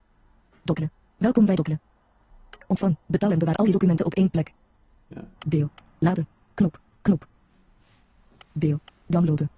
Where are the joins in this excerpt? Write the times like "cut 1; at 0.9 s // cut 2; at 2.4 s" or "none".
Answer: cut 1; at 5.4 s // cut 2; at 6.9 s

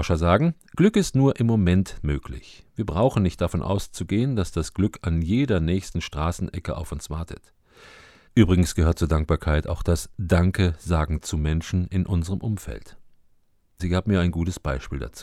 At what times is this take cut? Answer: cut 1; at 8.3 s // cut 2; at 13.8 s

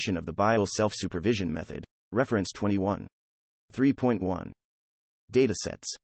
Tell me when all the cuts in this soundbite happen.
none

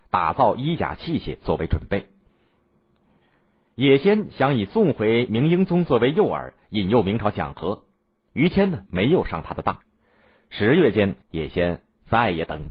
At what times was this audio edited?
cut 1; at 8.9 s // cut 2; at 11.2 s

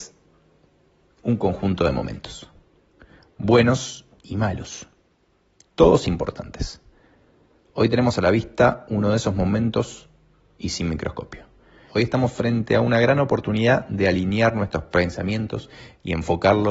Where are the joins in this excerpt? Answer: cut 1; at 11.9 s

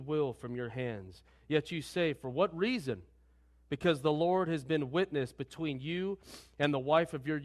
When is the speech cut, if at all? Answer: none

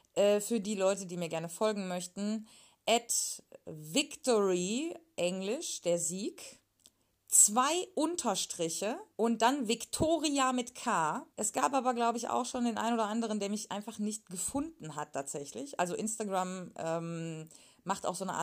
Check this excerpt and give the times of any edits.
cut 1; at 9.1 s // cut 2; at 11.3 s

